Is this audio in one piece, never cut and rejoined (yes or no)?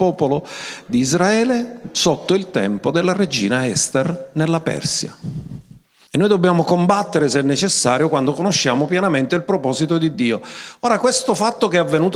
no